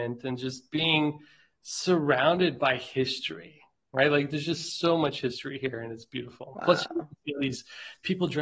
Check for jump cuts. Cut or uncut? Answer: uncut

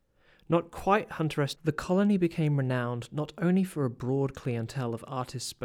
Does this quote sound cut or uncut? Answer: cut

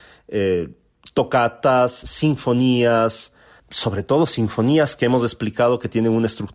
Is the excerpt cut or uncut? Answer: cut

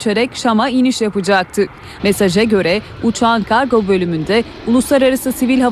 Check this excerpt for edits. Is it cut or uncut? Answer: cut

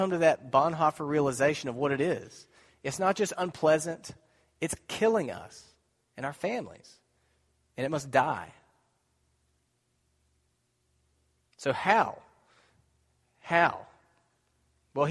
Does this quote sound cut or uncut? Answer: uncut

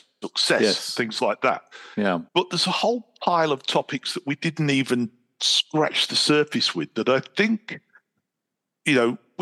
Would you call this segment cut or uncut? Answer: cut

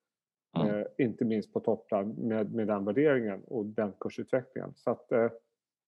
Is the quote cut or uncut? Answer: uncut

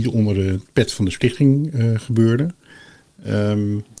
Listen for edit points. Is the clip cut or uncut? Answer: uncut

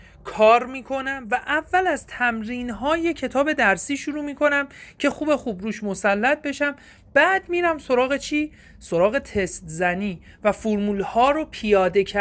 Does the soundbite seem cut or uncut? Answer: cut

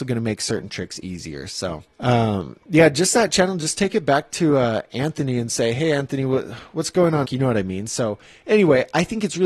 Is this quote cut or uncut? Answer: cut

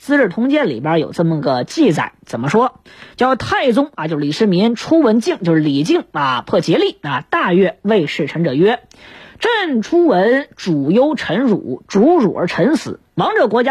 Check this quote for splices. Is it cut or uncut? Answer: uncut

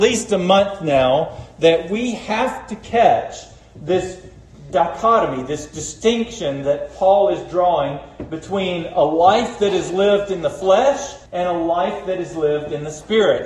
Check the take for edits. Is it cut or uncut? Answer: cut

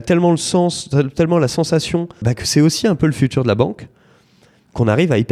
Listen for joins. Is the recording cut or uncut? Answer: cut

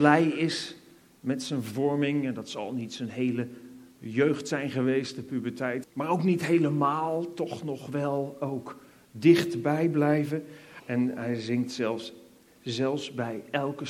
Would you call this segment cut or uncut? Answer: cut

